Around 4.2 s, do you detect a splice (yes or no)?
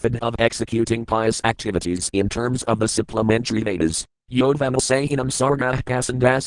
yes